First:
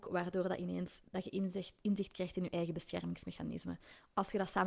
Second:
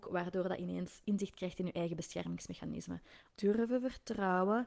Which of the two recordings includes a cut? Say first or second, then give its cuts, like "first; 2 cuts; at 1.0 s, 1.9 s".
second; 2 cuts; at 1.0 s, 3.3 s